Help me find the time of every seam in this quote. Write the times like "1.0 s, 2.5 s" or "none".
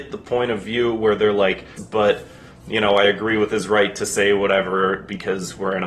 1.8 s